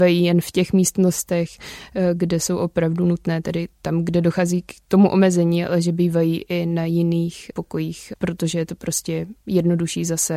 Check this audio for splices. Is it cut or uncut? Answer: uncut